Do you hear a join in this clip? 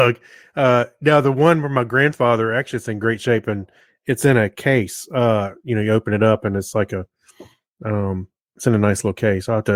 no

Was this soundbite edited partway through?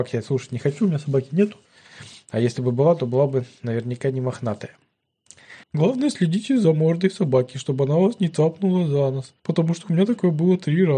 yes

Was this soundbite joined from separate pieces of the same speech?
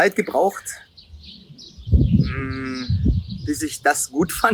yes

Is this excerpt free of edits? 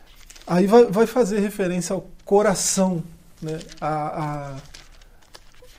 yes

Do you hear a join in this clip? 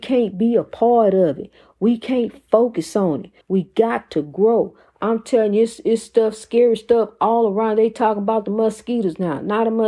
yes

